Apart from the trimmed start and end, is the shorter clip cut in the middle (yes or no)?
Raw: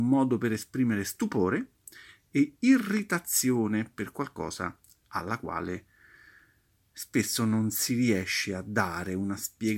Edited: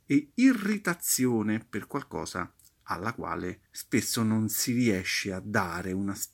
yes